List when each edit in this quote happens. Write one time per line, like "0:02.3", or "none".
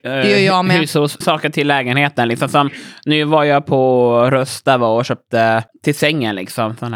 0:01.2